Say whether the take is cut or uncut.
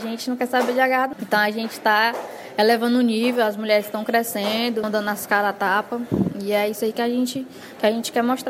cut